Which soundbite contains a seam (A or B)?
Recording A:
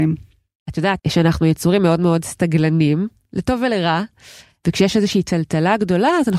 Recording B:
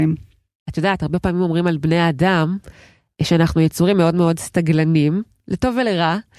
A